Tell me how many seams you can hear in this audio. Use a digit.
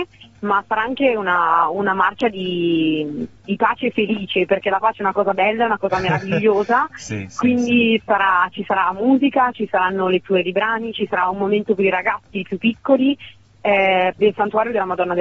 1